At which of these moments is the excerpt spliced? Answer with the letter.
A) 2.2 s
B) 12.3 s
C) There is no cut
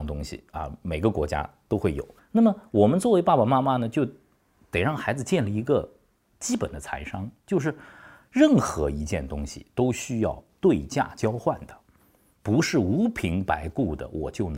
A